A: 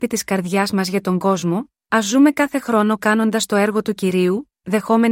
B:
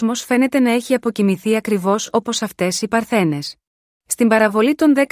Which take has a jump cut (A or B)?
B